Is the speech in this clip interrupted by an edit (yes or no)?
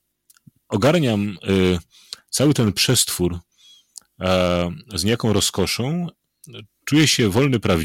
no